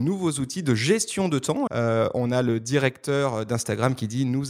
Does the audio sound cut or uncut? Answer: cut